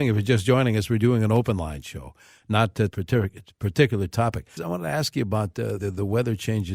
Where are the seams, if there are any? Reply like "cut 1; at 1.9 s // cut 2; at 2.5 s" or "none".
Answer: cut 1; at 2.9 s // cut 2; at 4.6 s // cut 3; at 5.8 s